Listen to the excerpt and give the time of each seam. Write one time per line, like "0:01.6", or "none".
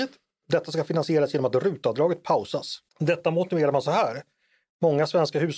0:02.9